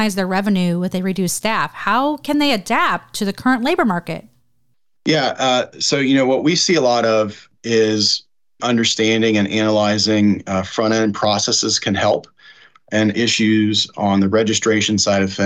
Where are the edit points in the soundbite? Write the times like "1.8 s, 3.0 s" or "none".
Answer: 8.6 s, 13.1 s